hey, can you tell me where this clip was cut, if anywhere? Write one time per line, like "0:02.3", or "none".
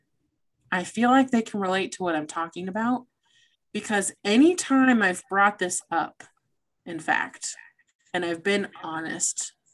0:03.6